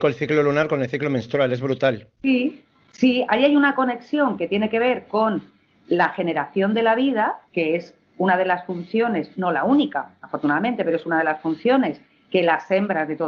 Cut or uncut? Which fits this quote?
cut